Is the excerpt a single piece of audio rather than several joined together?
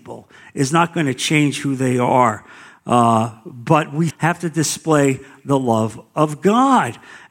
no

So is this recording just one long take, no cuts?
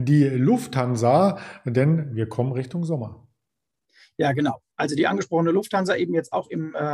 yes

